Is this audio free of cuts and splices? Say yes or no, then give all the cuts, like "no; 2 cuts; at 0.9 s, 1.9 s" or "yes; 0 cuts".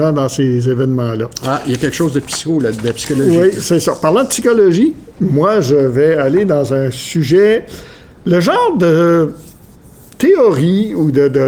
yes; 0 cuts